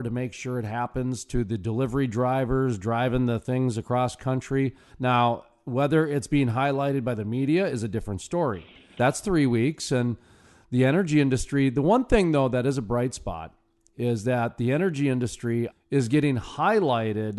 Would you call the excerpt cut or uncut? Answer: cut